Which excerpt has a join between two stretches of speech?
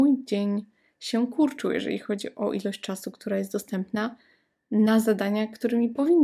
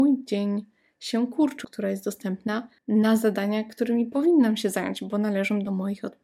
second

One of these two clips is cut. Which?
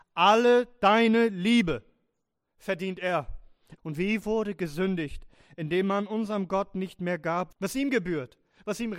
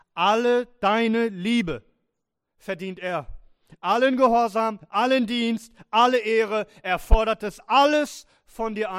first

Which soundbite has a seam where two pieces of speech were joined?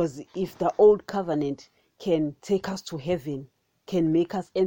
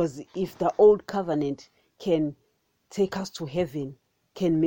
first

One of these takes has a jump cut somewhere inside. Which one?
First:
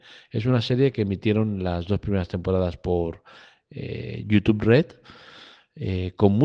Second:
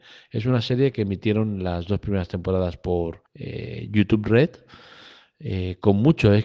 second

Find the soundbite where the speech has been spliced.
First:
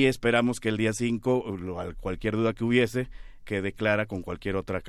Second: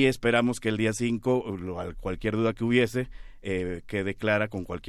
first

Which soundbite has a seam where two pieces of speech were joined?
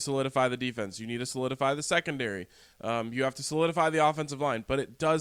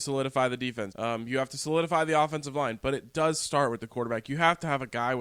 second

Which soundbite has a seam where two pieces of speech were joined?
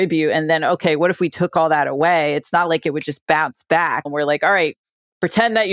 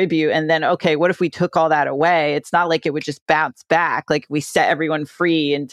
first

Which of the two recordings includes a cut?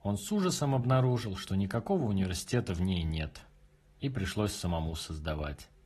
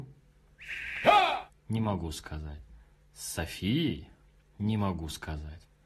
second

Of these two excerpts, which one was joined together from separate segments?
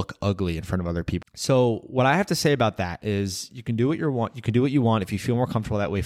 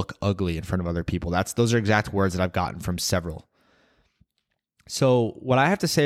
first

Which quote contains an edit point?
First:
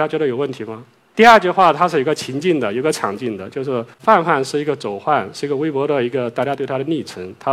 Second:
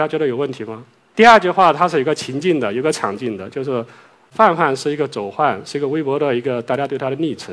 first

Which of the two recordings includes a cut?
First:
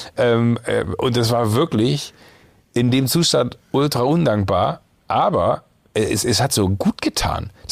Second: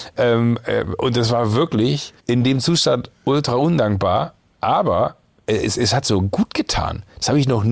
second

